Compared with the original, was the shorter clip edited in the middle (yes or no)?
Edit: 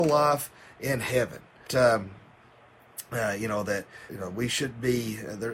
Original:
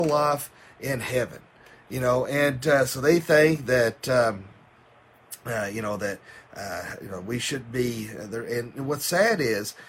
yes